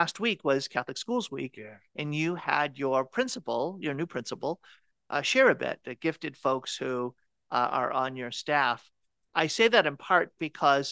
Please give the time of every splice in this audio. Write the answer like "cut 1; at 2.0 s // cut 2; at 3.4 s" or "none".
cut 1; at 5.8 s